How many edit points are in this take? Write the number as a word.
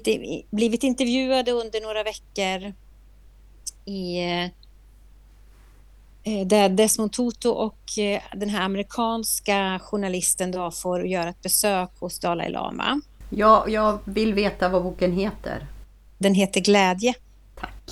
one